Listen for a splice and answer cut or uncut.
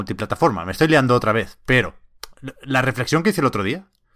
uncut